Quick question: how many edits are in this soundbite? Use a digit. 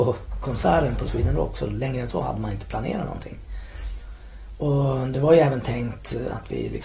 0